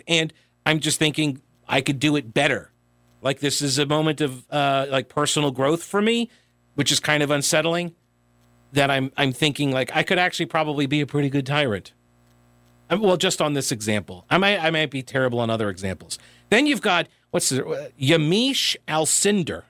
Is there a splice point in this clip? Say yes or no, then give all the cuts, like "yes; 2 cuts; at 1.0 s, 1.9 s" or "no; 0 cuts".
yes; 1 cut; at 3.2 s